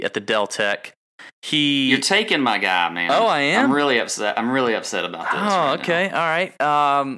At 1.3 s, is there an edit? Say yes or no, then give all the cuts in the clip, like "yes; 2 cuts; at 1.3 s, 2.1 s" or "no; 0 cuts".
yes; 1 cut; at 1.3 s